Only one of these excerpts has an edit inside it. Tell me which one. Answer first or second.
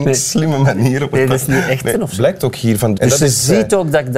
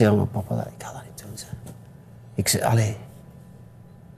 first